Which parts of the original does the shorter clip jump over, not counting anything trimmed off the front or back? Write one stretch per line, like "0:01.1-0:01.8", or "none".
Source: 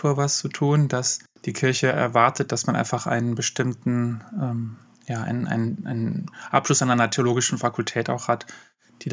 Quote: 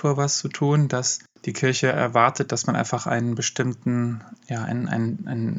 0:04.3-0:04.9